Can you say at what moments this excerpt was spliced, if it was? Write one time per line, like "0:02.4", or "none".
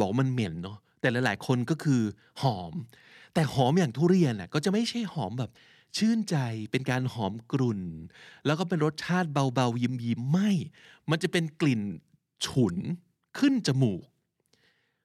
none

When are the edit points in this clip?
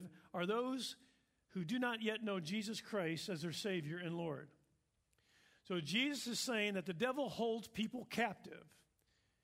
none

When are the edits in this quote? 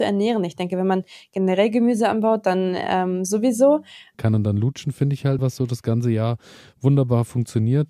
0:04.1
0:05.4

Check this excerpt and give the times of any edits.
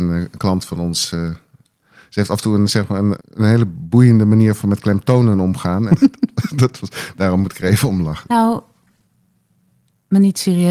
0:03.2
0:05.9
0:08.2

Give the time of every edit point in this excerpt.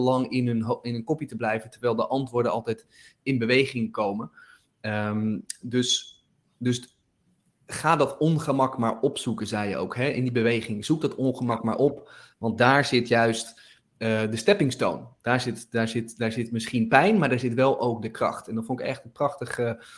none

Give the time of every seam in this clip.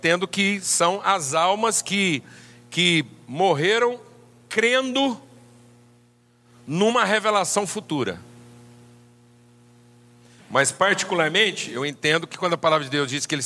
0:10.4

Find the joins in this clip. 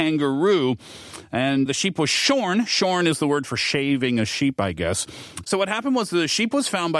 0:01.7
0:05.4

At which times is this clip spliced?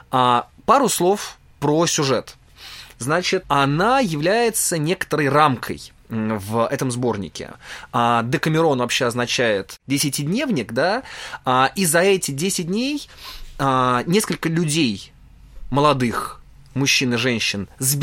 0:03.4

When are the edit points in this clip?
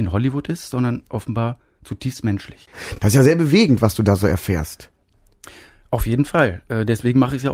none

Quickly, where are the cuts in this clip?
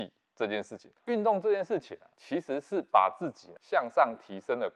0:01.0

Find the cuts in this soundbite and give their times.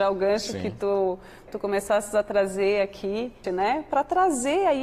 0:01.5
0:03.4

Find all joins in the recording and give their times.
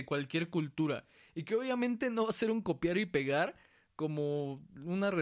none

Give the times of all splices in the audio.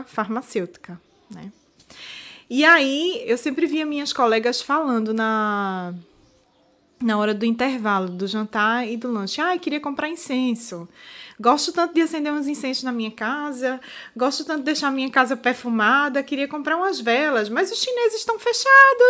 0:03.2

